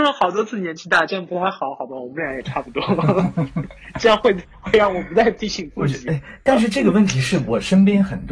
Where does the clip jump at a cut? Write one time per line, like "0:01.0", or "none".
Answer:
none